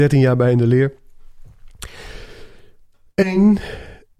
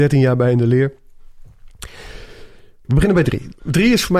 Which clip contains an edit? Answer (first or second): second